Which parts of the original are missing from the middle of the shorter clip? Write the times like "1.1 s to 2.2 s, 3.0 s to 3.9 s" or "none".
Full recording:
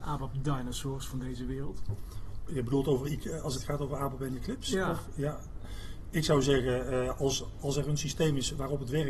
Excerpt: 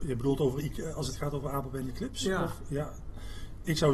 none